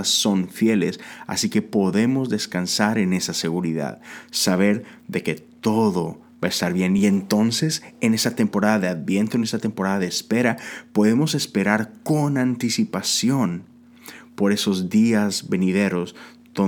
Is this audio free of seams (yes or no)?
yes